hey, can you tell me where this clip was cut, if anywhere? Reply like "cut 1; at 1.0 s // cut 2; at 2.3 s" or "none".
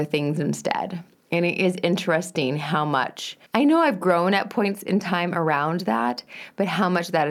cut 1; at 3.5 s

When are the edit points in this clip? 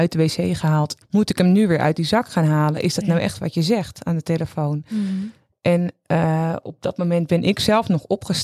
cut 1; at 1.0 s

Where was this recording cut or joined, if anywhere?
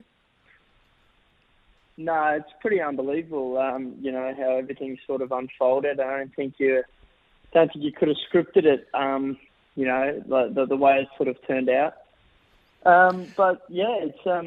none

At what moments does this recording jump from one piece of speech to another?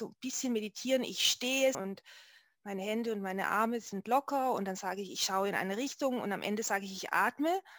cut 1; at 1.7 s

